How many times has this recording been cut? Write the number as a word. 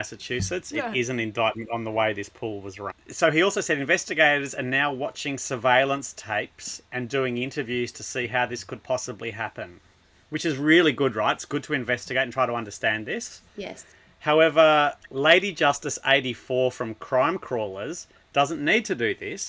one